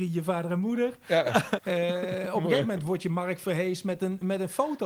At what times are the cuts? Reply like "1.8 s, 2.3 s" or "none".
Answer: 1.6 s